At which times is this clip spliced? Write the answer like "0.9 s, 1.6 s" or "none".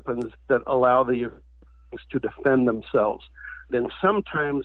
3.7 s